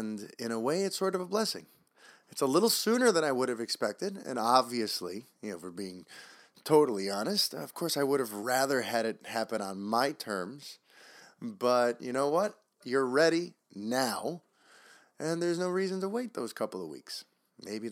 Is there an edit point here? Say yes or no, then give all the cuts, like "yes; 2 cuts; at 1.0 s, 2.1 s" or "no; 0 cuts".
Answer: yes; 1 cut; at 12.8 s